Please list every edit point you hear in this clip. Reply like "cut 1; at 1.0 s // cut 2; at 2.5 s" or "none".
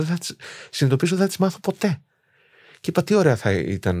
none